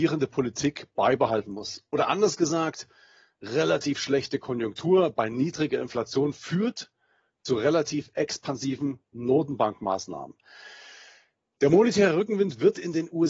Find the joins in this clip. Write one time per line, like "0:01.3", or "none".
none